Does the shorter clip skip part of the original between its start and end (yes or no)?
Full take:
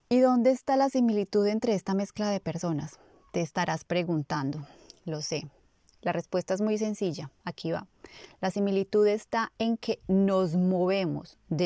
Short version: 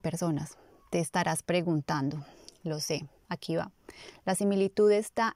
yes